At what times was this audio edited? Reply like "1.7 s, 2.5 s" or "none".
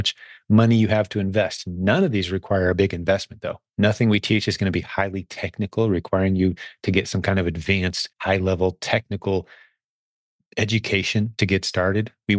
3.7 s, 8.1 s